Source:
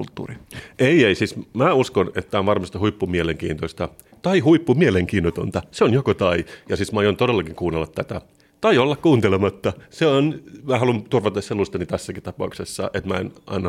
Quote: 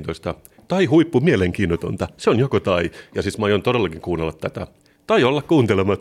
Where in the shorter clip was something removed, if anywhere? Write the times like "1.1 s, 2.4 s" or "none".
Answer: none